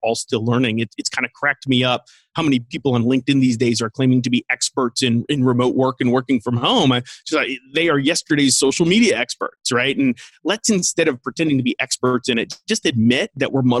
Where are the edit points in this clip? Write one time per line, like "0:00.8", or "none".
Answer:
none